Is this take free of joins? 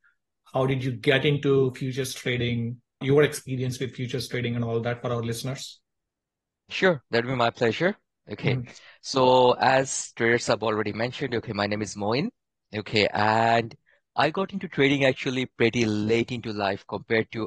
no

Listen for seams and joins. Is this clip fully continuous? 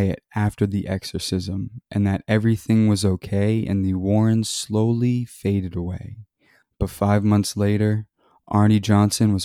yes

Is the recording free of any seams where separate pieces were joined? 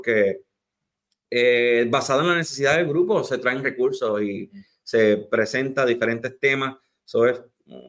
yes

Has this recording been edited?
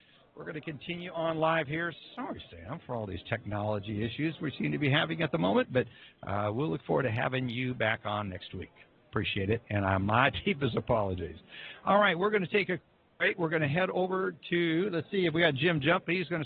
no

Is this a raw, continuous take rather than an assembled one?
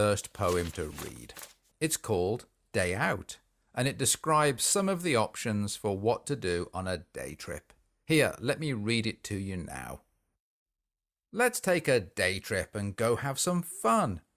no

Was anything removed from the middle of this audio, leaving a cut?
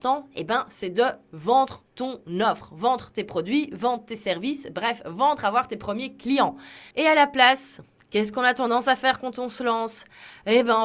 yes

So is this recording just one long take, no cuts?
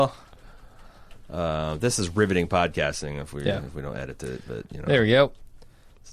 yes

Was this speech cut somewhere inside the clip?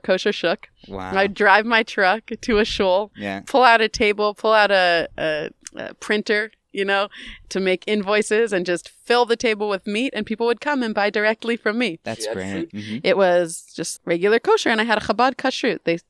yes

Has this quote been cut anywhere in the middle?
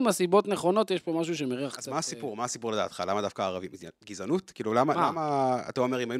no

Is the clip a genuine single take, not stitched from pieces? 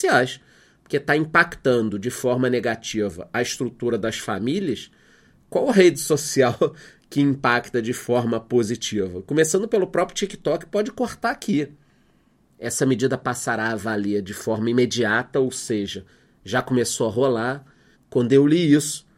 no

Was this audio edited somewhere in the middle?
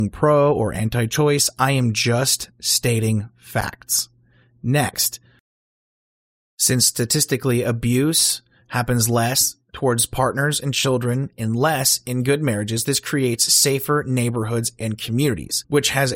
no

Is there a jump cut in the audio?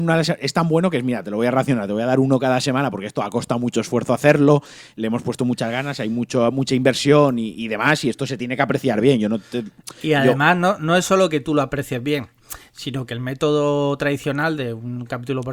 no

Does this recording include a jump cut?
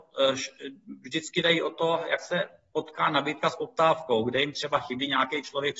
no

